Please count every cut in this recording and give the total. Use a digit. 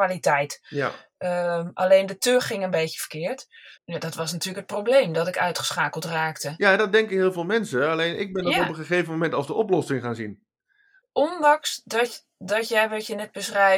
1